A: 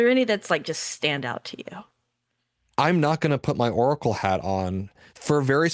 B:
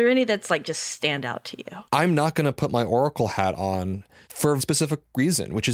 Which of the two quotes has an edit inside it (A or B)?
B